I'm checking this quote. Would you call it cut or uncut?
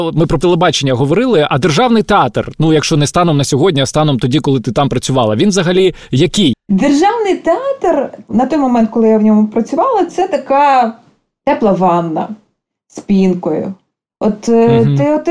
cut